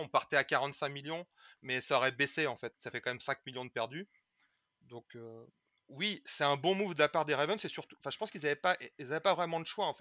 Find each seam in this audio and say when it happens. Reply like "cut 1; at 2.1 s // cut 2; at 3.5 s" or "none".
cut 1; at 2.7 s